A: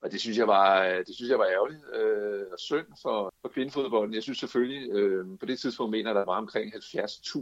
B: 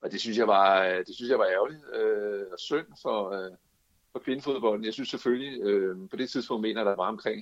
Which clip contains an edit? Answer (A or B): A